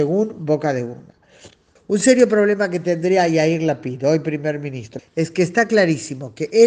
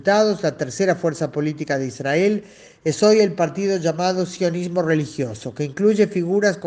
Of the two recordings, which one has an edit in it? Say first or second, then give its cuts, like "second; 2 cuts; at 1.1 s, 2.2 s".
first; 2 cuts; at 1.8 s, 5.0 s